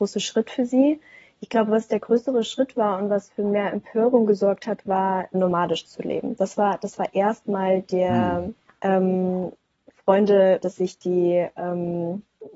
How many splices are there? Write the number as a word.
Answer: three